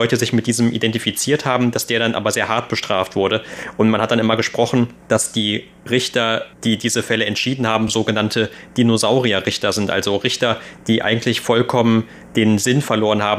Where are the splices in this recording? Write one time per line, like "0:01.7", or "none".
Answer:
none